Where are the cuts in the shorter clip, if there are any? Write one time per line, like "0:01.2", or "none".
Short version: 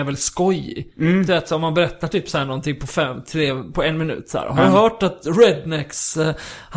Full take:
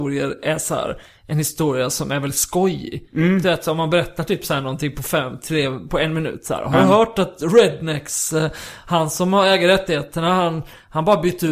none